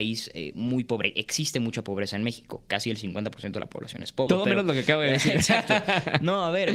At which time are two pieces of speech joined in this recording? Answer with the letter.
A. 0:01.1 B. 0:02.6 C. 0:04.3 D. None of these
C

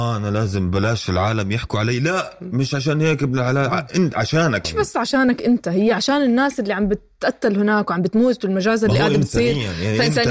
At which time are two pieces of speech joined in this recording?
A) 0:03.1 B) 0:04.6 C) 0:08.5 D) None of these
B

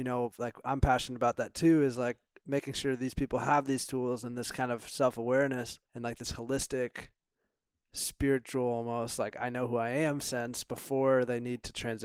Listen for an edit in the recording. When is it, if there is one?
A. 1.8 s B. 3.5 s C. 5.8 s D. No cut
C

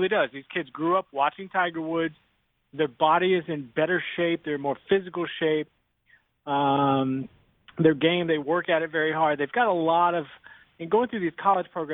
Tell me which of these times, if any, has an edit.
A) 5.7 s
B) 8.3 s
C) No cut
C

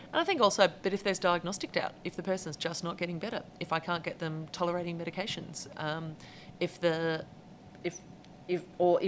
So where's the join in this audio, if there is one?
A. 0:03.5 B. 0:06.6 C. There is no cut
B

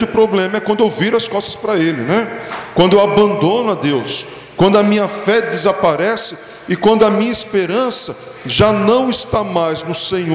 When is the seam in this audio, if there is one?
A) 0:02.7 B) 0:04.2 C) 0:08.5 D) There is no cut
D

